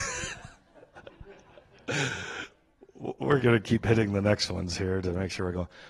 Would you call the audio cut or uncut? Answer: cut